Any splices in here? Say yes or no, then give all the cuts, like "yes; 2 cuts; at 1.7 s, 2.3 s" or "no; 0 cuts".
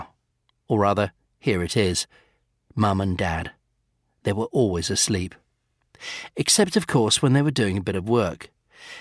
no; 0 cuts